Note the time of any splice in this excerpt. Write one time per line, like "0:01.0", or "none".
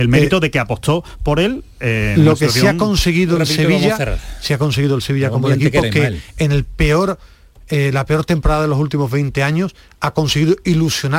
none